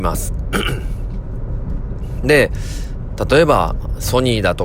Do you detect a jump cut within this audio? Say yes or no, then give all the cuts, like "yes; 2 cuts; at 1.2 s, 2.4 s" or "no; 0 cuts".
no; 0 cuts